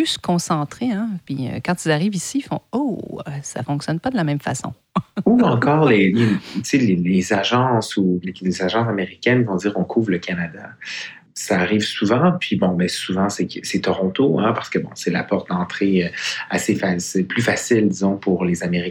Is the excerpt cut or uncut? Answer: cut